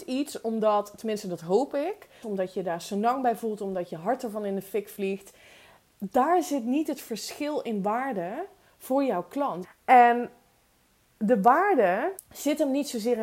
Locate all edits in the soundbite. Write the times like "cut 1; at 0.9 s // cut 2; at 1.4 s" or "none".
cut 1; at 2.2 s // cut 2; at 9.6 s // cut 3; at 12.2 s